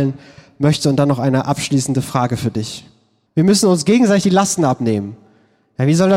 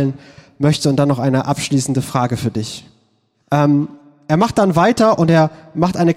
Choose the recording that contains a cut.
first; 1 cut; at 3.3 s

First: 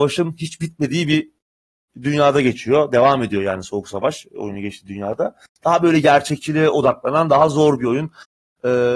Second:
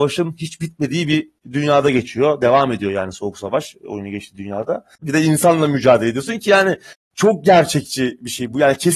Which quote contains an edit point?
second; 2 cuts; at 1.4 s, 5.0 s

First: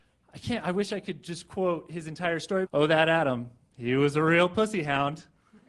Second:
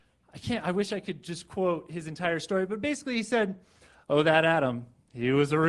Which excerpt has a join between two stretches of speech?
first; 1 cut; at 2.7 s

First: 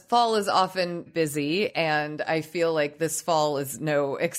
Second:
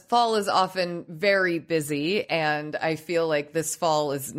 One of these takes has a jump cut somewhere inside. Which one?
first; 1 cut; at 1.1 s

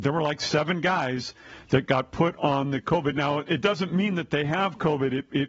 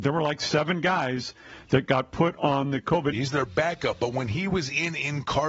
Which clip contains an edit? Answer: second; 1 cut; at 3.1 s

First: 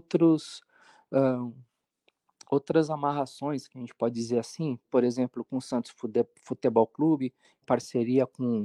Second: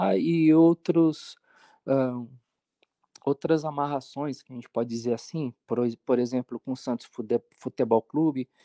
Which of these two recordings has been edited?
first; 2 cuts; at 4.8 s, 7.6 s

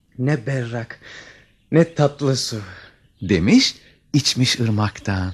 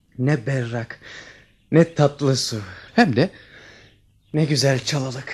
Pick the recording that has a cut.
second; 1 cut; at 2.9 s

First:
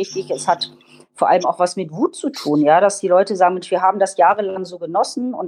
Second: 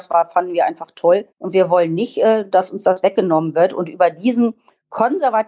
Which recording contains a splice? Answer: second; 1 cut; at 1.3 s

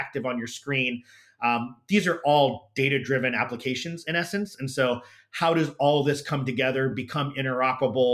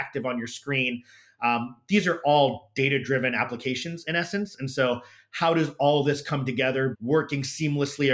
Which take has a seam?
second; 1 cut; at 6.9 s

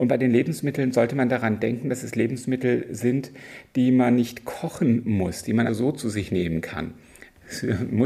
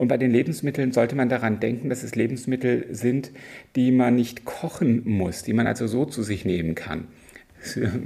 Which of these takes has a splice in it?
first; 1 cut; at 5.7 s

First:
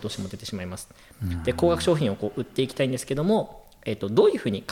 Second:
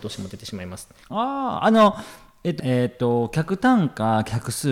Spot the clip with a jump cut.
second; 2 cuts; at 1.0 s, 2.6 s

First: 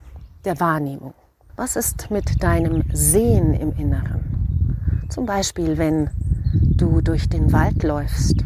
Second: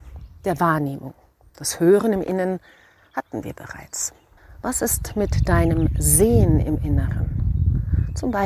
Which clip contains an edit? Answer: first; 1 cut; at 1.5 s

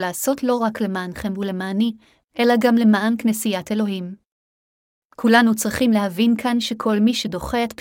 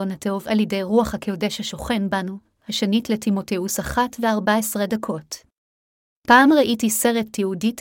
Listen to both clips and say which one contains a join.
second; 1 cut; at 6.1 s

